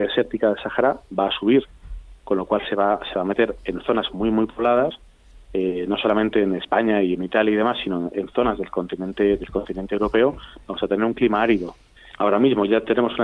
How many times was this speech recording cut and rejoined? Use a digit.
1